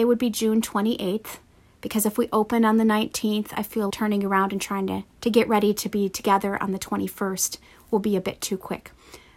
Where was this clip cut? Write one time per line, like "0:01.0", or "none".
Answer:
0:03.9
0:05.1